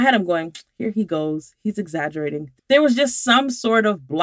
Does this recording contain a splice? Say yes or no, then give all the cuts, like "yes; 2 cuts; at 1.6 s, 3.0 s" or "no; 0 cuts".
yes; 1 cut; at 2.6 s